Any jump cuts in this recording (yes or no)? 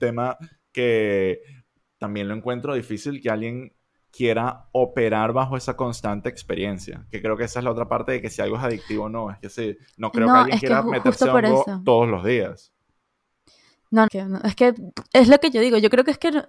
yes